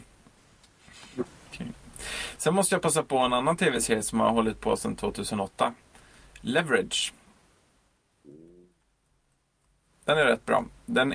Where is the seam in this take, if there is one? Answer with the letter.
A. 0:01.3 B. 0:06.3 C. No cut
A